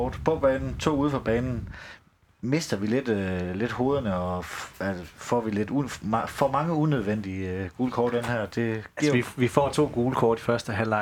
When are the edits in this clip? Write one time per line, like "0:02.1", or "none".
none